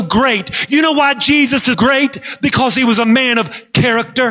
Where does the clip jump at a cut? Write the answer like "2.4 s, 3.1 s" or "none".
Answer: 1.7 s